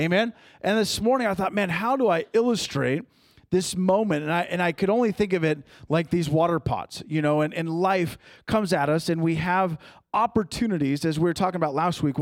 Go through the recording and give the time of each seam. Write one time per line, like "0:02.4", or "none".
none